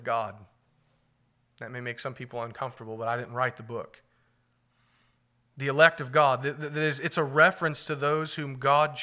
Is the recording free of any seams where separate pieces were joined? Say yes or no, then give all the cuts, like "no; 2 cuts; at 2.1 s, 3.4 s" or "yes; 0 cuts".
yes; 0 cuts